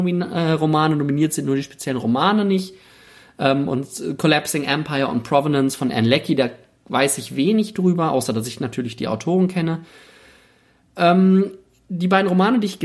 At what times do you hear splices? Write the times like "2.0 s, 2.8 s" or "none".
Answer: none